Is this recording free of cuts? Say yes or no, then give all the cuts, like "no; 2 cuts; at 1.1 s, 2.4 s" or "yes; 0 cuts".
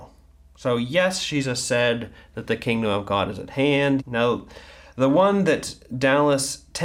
no; 1 cut; at 4.0 s